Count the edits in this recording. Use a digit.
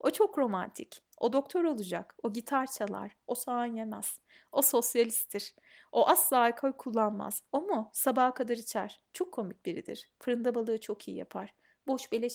0